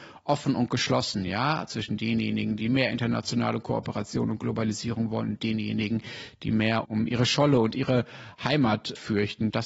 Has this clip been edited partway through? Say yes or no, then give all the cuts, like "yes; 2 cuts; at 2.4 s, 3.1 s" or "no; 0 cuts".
no; 0 cuts